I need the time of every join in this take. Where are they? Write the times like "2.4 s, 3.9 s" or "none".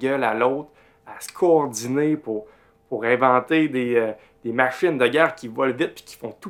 none